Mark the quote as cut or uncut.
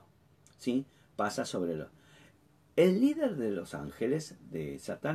uncut